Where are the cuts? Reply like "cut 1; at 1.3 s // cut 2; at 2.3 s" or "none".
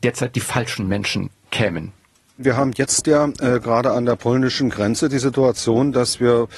none

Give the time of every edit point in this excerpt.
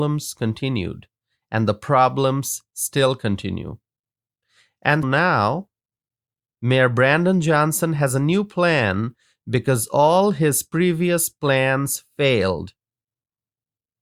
cut 1; at 5.0 s

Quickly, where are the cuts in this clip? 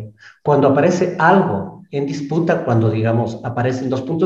none

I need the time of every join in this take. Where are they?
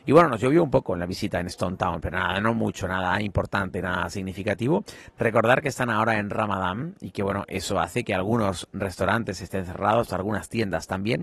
none

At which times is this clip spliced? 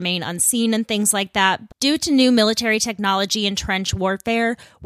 cut 1; at 1.7 s

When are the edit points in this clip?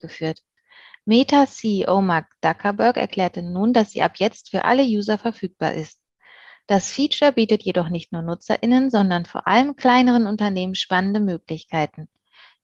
none

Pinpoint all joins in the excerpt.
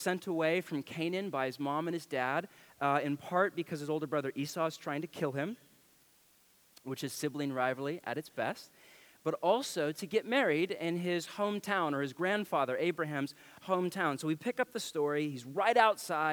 none

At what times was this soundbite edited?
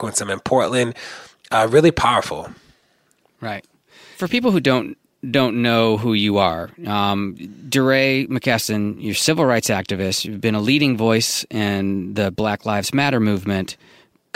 none

